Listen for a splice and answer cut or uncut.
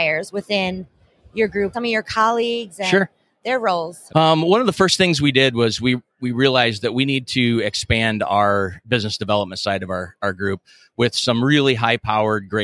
cut